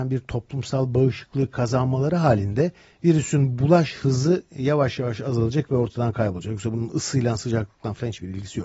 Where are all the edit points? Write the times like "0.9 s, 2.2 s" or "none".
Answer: none